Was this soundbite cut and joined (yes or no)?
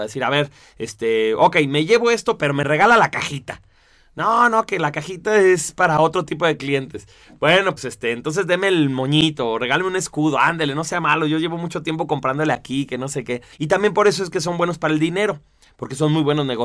yes